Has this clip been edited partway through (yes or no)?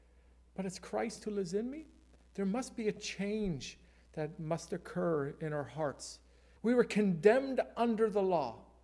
yes